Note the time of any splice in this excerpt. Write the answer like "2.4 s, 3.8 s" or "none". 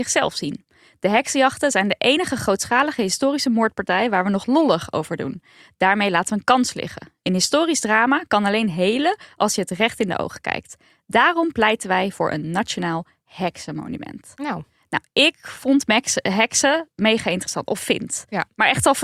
none